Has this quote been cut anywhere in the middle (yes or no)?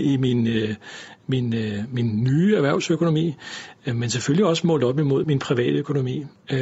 yes